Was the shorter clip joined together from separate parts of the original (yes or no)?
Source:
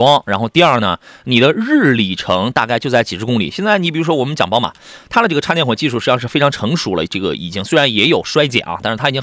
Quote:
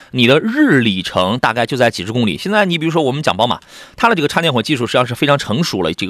no